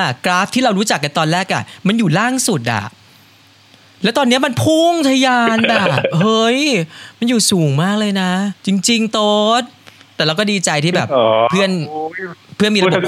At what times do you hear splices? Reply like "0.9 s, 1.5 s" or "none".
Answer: 8.6 s